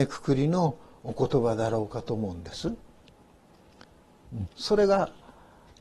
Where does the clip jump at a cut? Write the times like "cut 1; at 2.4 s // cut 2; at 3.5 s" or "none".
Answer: cut 1; at 4.5 s